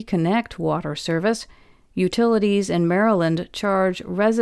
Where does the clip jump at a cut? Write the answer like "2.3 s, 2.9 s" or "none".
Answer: none